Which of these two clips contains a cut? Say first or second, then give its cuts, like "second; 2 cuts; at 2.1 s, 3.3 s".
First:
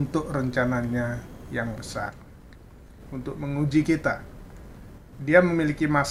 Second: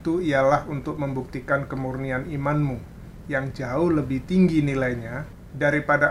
first; 1 cut; at 5.0 s